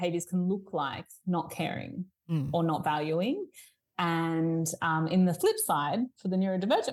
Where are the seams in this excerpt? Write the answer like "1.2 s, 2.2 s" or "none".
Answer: none